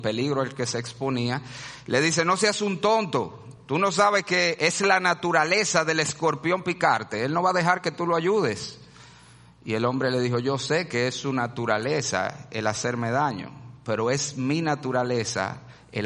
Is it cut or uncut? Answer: uncut